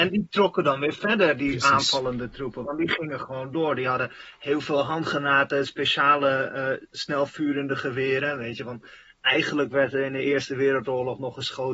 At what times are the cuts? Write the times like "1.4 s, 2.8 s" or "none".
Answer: none

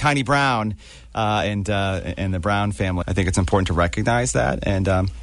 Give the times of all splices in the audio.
3.0 s

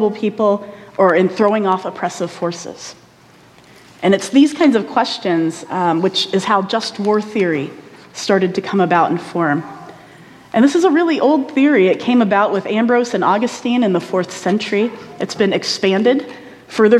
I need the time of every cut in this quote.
none

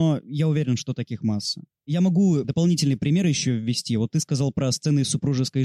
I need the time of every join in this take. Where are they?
2.4 s

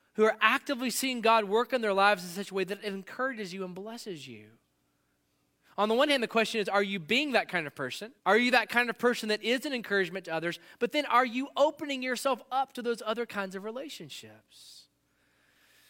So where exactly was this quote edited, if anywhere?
8.2 s

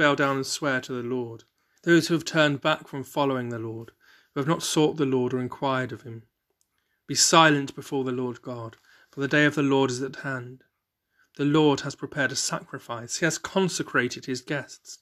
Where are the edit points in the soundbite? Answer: 1.8 s

